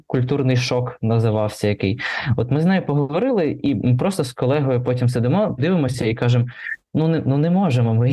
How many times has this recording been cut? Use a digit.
1